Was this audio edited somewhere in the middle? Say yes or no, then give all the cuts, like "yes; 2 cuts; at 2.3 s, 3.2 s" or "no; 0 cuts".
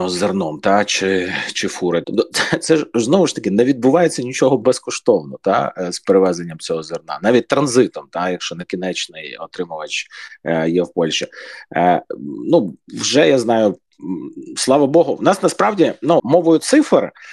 yes; 2 cuts; at 2.0 s, 16.2 s